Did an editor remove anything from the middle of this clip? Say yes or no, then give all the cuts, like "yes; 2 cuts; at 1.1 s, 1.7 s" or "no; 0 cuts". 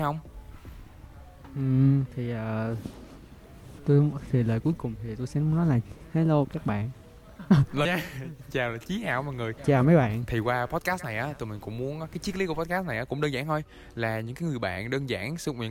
yes; 3 cuts; at 2.1 s, 7.8 s, 9.6 s